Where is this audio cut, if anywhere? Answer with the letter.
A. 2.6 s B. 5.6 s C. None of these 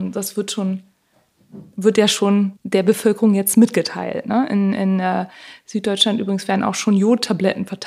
A